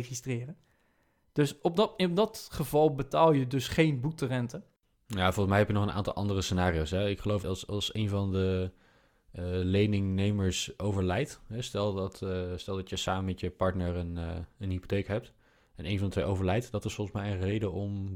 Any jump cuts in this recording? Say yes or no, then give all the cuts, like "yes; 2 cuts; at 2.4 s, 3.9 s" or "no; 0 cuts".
yes; 1 cut; at 7.4 s